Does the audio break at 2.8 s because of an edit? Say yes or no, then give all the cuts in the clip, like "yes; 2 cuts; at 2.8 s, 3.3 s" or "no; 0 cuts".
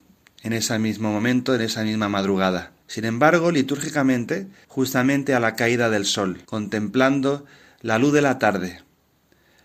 yes; 3 cuts; at 2.8 s, 4.6 s, 6.4 s